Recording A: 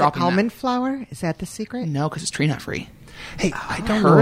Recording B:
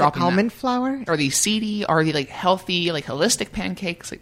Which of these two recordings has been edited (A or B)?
B